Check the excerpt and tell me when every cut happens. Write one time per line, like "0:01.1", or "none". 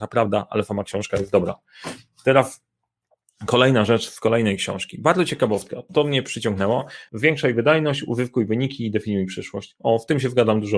0:07.1